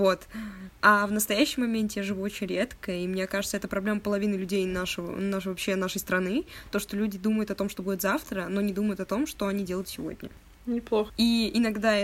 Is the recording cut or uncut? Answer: cut